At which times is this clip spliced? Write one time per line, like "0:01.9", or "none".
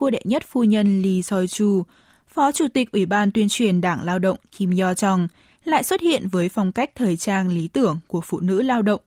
0:05.6

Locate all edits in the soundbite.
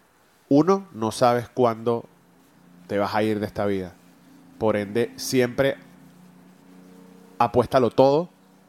none

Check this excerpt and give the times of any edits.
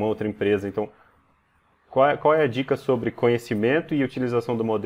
none

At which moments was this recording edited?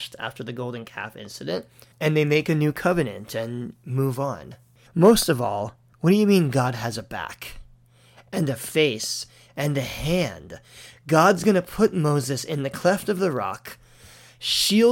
0:04.9

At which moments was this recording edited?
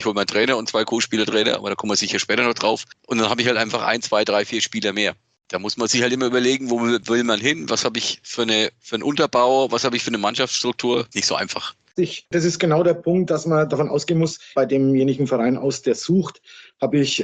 0:12.0
0:14.5

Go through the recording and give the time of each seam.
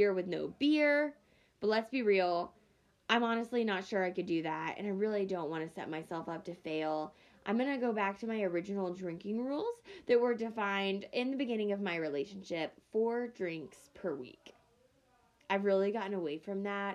none

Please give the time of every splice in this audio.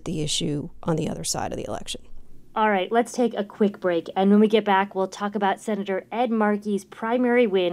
none

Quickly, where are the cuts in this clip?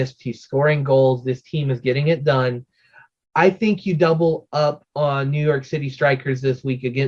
none

